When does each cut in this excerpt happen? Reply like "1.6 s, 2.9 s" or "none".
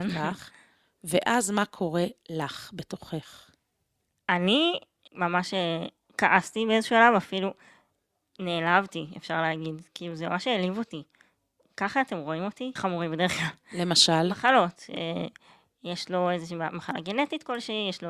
5.1 s, 12.8 s